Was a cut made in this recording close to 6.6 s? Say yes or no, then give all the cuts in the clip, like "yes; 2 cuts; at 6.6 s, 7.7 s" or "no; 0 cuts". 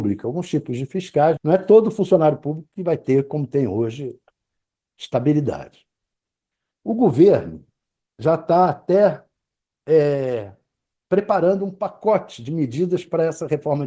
no; 1 cut; at 1.4 s